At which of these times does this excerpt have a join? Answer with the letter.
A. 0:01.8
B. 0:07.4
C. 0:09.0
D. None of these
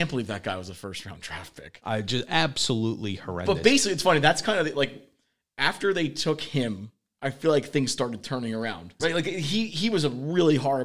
C